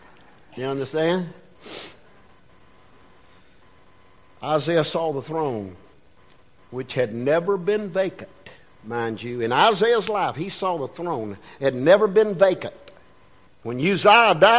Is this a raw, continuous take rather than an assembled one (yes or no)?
yes